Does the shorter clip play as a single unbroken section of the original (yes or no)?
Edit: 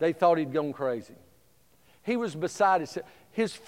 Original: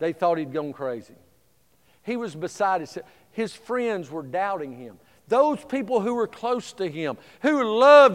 yes